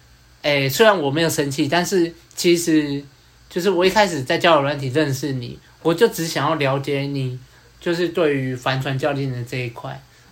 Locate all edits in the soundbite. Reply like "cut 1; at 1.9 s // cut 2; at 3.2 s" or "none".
none